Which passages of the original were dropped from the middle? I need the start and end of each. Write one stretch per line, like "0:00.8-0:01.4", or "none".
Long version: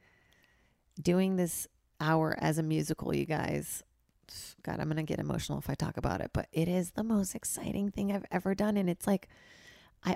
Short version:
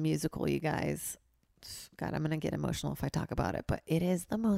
none

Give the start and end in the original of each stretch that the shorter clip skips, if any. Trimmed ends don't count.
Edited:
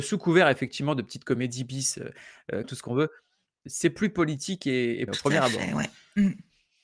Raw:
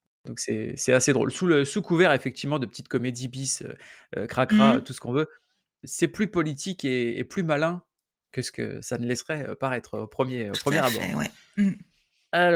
0:04.3-0:04.8
0:07.3-0:10.5

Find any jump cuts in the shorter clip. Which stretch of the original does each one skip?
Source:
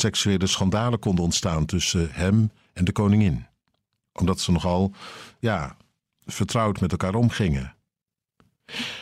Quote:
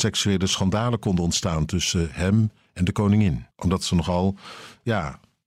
0:03.5-0:04.1

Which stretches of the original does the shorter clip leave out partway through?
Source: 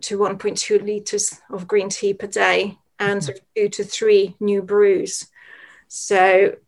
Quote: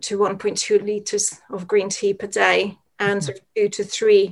none

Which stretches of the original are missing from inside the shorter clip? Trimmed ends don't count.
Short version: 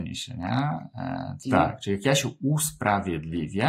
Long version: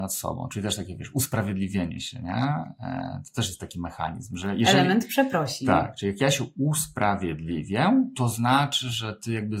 0:03.3-0:05.6

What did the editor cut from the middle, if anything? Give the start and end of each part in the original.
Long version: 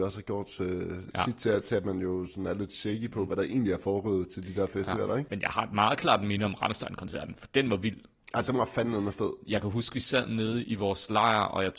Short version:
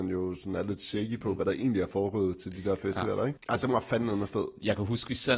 0:05.3-0:08.2

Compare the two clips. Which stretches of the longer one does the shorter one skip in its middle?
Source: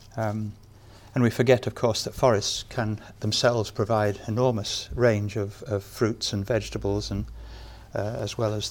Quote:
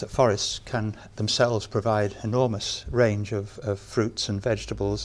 none

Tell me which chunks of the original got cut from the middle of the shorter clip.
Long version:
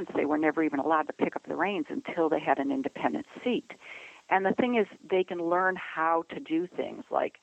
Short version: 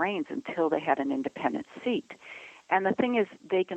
none

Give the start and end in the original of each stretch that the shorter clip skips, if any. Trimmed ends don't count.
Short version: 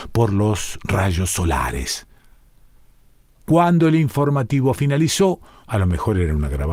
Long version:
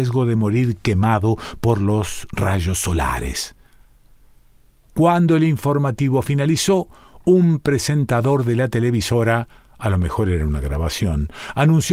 0:07.1-0:09.7

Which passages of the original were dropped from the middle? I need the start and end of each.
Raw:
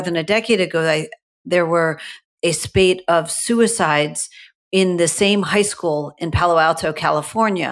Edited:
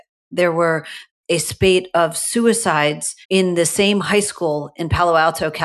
0:04.4-0:04.6

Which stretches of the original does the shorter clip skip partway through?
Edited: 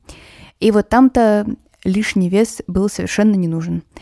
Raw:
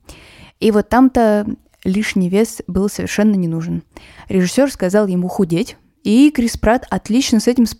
none

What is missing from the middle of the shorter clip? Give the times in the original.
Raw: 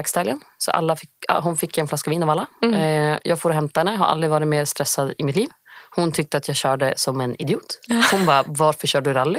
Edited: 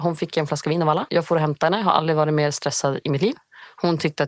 0:02.5-0:03.2

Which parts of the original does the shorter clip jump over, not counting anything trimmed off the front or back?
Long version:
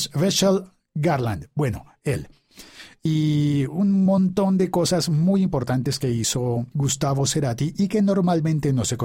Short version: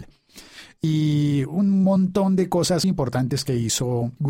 0:05.1-0:05.4

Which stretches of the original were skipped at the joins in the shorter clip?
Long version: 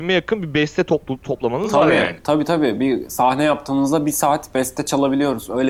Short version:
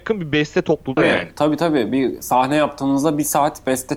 0:01.2-0:01.8

